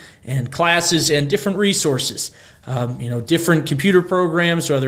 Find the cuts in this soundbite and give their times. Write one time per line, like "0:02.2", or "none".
none

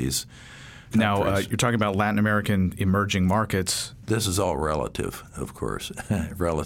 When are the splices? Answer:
0:00.9
0:04.0

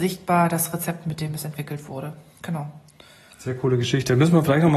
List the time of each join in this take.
none

